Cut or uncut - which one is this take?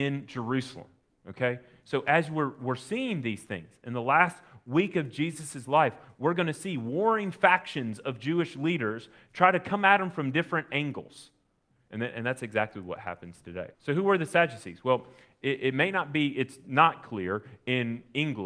cut